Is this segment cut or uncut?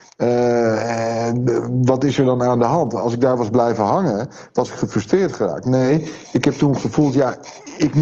uncut